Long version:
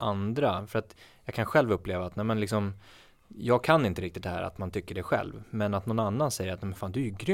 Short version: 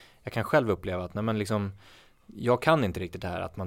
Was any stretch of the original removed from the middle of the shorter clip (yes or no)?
no